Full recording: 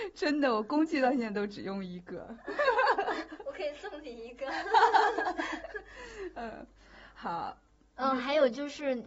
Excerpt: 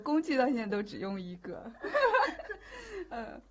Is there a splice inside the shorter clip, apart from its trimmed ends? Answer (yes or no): yes